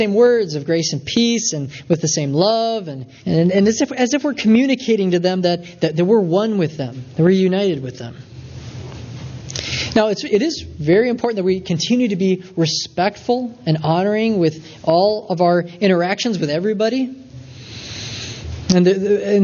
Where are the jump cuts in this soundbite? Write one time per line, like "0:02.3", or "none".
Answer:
0:03.2